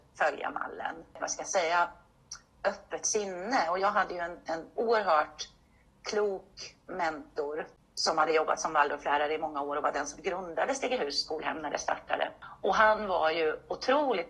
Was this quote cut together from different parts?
yes; 1 cut; at 1.2 s

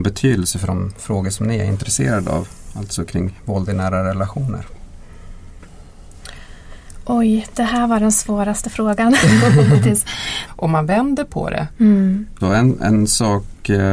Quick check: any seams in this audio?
yes; 2 cuts; at 10.5 s, 12.4 s

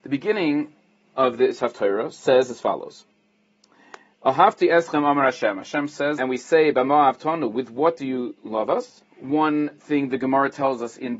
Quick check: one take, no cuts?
no; 2 cuts; at 6.2 s, 9.0 s

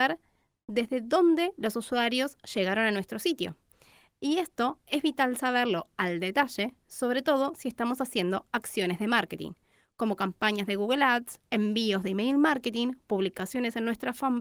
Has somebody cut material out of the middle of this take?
no; 0 cuts

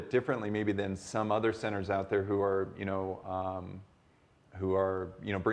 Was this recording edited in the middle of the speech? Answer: no; 0 cuts

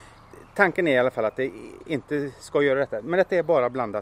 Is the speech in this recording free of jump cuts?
yes; 0 cuts

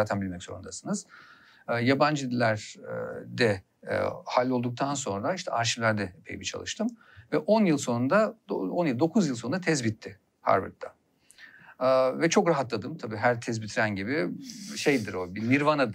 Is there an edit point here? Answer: no; 0 cuts

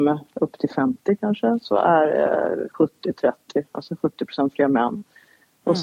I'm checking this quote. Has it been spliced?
no; 0 cuts

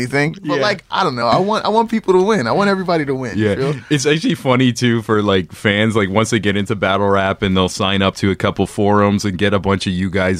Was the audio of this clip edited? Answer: no; 0 cuts

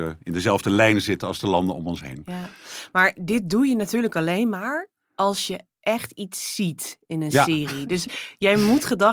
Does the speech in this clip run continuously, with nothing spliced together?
yes; 0 cuts

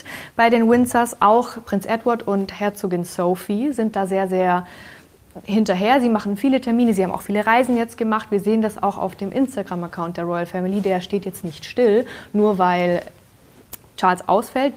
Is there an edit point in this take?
no; 0 cuts

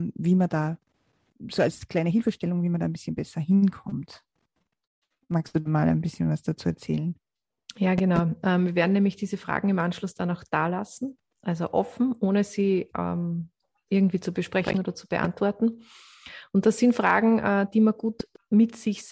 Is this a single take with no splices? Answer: yes; 0 cuts

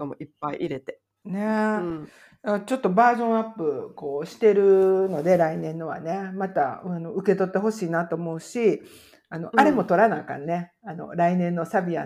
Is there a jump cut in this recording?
yes; 1 cut; at 1.2 s

